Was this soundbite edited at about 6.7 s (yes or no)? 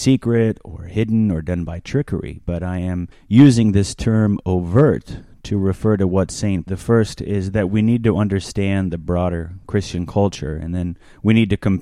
yes